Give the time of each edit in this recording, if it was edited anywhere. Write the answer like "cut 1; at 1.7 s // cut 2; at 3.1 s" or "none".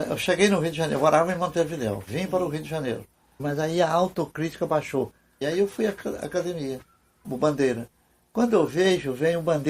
cut 1; at 3.4 s // cut 2; at 5.4 s // cut 3; at 7.2 s